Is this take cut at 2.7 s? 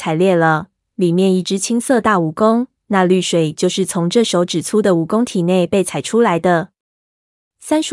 yes; 1 cut; at 2.7 s

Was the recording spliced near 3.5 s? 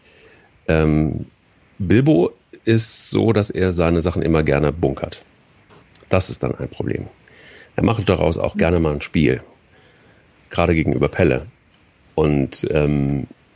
no; 0 cuts

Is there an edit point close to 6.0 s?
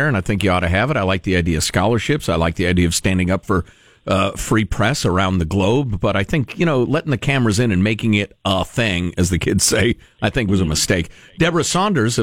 no; 0 cuts

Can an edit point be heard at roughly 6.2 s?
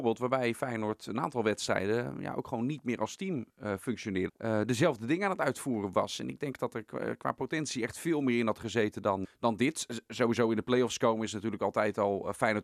no; 2 cuts; at 4.3 s, 9.2 s

